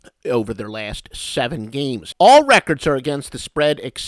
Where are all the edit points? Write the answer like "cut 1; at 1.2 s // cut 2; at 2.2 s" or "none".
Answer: cut 1; at 2.1 s